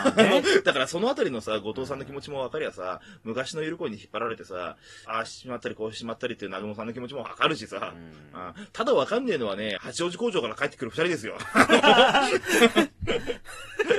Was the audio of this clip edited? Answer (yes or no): yes